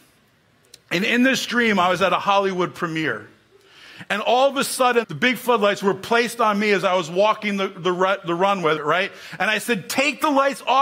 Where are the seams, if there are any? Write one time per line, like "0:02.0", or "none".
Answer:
0:05.0
0:08.8